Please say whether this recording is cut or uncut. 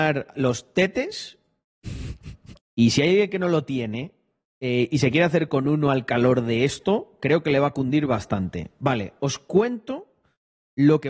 cut